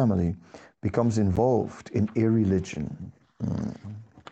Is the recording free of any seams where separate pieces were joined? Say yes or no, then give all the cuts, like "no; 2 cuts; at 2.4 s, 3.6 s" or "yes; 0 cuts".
yes; 0 cuts